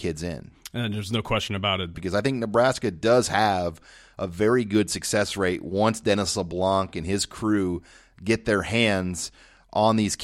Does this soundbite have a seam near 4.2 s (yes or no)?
no